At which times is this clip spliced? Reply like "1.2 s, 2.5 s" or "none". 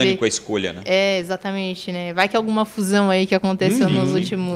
none